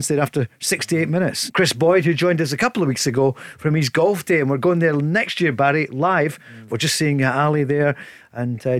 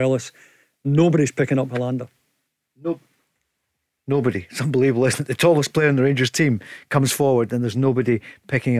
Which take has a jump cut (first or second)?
first